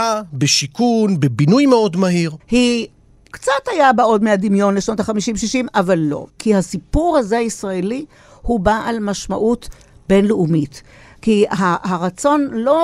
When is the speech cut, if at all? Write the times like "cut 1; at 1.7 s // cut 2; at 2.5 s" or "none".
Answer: cut 1; at 2.4 s // cut 2; at 6.3 s

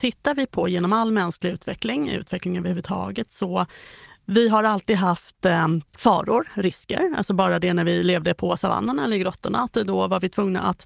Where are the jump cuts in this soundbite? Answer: cut 1; at 5.9 s

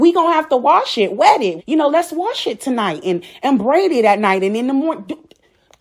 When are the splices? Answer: cut 1; at 1.6 s

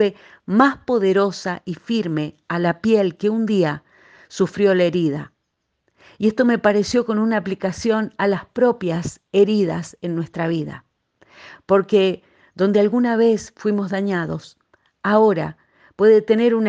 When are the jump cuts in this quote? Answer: none

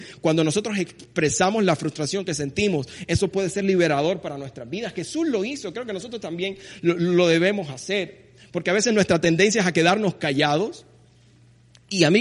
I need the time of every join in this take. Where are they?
none

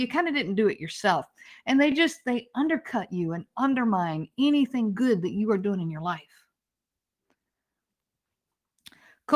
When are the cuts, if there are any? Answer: none

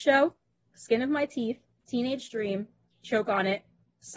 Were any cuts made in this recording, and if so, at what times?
cut 1; at 1.7 s

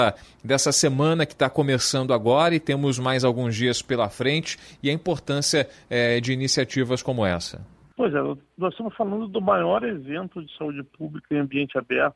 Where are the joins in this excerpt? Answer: none

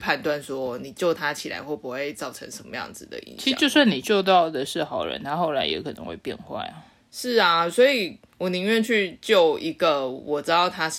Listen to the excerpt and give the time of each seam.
none

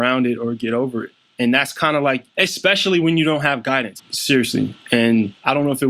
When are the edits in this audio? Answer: cut 1; at 2.3 s // cut 2; at 4.0 s

